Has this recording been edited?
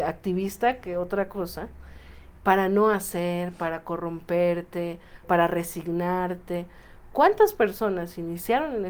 yes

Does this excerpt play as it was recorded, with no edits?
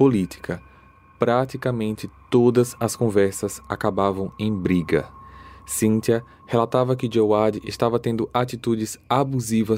yes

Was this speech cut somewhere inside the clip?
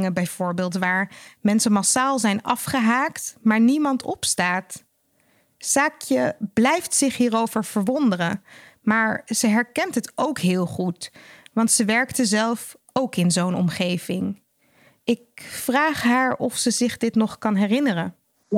no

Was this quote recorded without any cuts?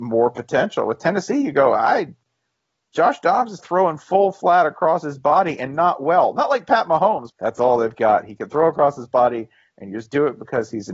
no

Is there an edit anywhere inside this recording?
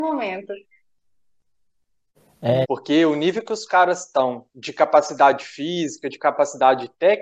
yes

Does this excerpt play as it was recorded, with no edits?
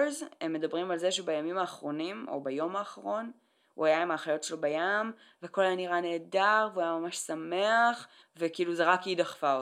no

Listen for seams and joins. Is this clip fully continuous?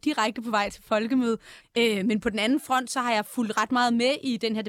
no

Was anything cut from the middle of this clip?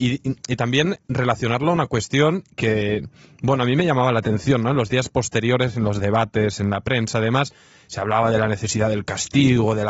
no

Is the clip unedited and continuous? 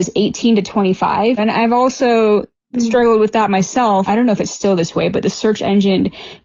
no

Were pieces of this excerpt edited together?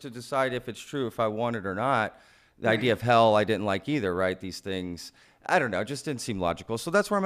no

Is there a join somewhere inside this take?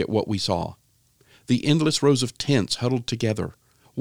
no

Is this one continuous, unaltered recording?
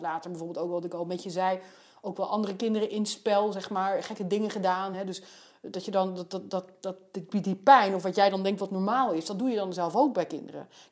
yes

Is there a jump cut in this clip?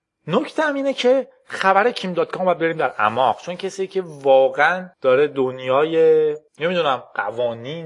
yes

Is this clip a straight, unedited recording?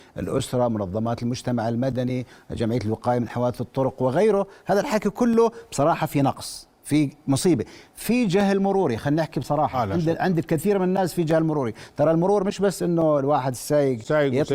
yes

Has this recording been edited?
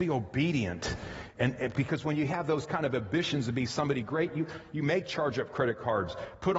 no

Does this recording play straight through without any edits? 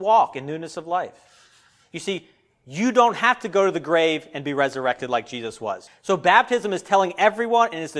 no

